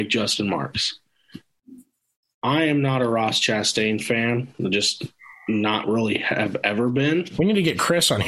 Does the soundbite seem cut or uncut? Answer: uncut